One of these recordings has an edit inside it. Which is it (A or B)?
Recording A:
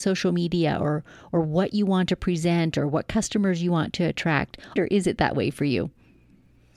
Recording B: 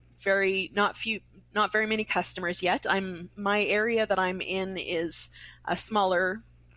A